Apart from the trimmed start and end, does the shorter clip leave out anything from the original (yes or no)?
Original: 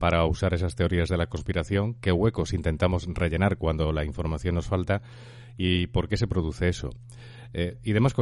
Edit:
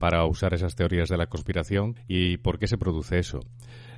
yes